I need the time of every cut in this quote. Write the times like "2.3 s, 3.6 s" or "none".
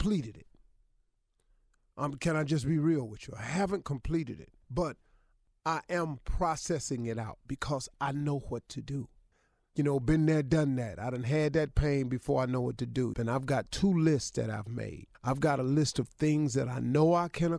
4.6 s, 13.1 s, 15.1 s